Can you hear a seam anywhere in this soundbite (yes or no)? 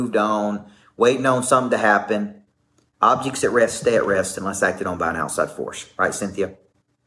no